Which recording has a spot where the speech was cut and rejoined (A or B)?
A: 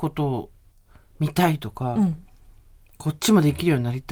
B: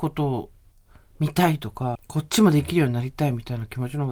B